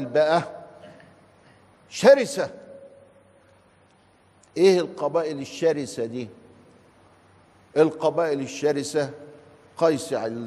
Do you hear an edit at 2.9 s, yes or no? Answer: no